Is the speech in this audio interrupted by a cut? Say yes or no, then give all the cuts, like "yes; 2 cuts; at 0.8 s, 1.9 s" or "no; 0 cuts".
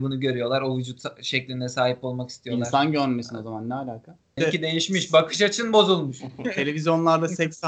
yes; 1 cut; at 4.4 s